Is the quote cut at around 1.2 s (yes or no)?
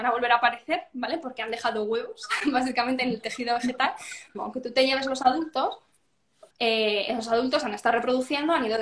no